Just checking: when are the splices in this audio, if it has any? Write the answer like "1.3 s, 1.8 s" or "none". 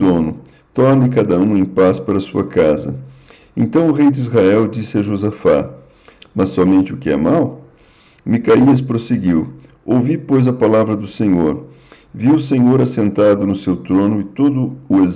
6.2 s